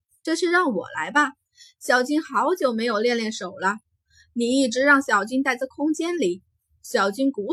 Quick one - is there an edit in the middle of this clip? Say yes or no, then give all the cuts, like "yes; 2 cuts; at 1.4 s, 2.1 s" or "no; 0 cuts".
no; 0 cuts